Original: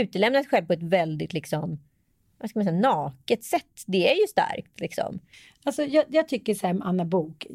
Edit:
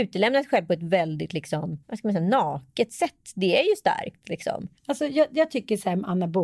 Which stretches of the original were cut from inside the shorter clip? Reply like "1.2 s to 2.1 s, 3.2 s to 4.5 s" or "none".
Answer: 1.8 s to 2.3 s, 5.3 s to 5.5 s